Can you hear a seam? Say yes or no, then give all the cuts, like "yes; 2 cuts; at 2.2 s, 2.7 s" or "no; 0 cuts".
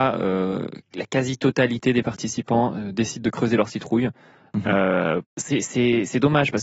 yes; 1 cut; at 5.2 s